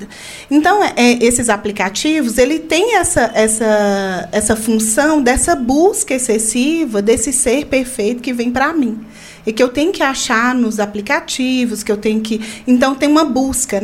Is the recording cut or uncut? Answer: uncut